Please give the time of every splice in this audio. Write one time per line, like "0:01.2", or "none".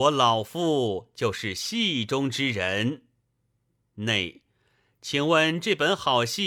none